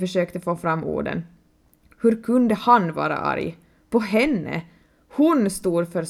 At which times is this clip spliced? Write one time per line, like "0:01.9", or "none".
none